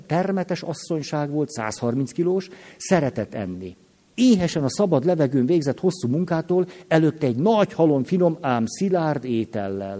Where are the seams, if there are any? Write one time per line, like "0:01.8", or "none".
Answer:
0:04.1

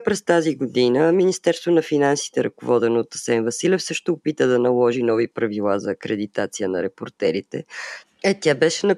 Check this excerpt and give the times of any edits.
0:08.0

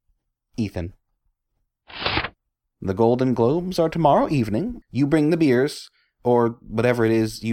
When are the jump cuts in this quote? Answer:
0:02.7
0:04.8

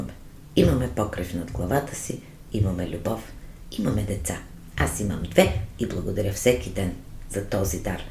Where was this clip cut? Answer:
none

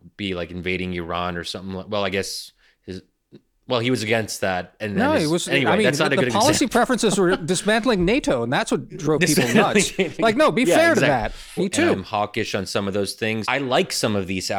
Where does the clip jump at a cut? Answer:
0:11.6
0:13.4

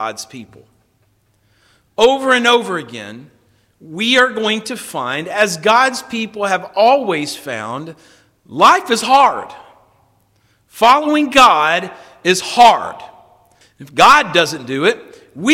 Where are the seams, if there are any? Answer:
0:13.6

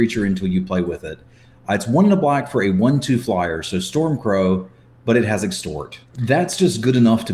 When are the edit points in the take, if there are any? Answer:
0:06.1

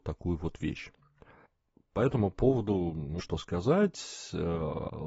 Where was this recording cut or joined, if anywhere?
0:03.2

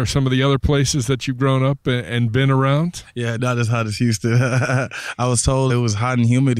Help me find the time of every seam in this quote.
0:03.4
0:05.7

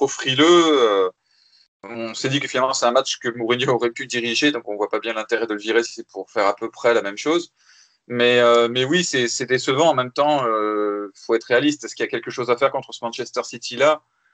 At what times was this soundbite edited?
none

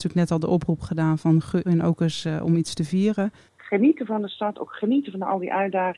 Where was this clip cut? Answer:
0:01.6
0:03.5

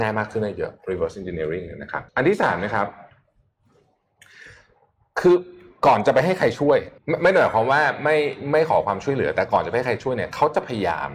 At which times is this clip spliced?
0:02.1
0:07.0

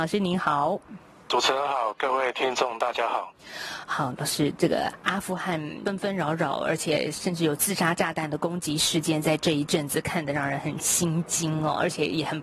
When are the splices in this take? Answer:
none

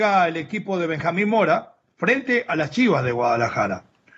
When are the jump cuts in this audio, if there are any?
0:01.8

